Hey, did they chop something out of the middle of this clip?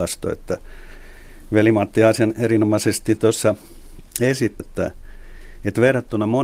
yes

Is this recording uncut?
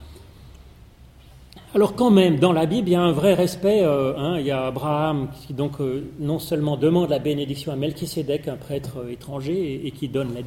yes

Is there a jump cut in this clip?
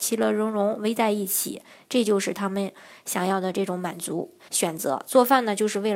yes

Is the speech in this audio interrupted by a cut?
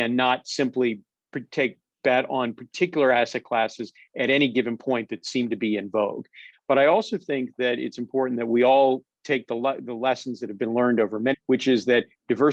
yes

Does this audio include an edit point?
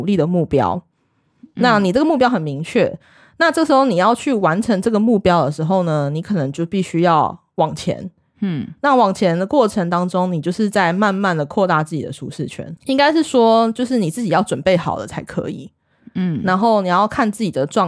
yes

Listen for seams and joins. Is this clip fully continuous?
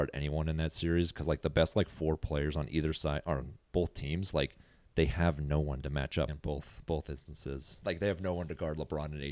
no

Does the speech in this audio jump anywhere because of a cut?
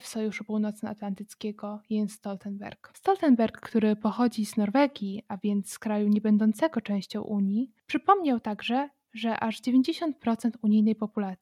no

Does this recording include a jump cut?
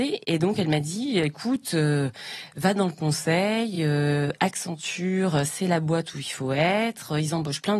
no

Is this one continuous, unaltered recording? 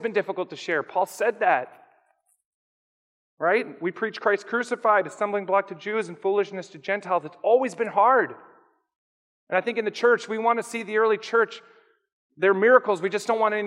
yes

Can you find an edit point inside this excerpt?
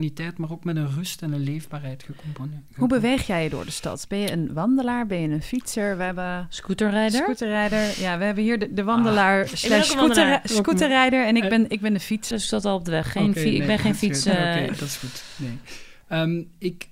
yes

